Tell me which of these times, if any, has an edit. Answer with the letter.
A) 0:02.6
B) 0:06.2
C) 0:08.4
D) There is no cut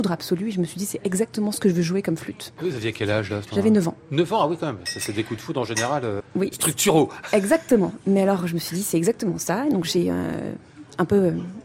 B